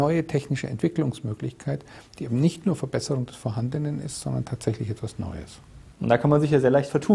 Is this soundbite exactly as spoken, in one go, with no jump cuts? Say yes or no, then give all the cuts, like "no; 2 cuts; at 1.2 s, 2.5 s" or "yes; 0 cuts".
no; 1 cut; at 5.9 s